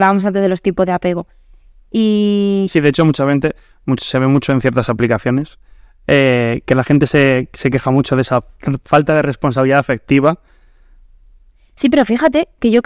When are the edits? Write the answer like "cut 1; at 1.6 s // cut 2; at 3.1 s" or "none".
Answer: none